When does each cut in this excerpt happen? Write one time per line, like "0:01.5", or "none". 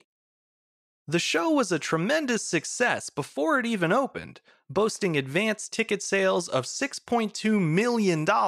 none